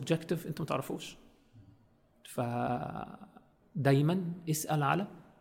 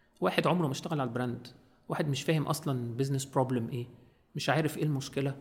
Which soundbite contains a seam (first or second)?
first